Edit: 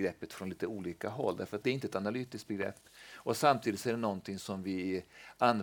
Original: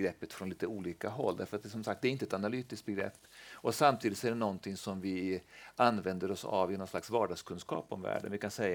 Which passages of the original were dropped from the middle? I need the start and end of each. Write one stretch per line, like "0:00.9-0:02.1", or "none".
0:01.6-0:02.0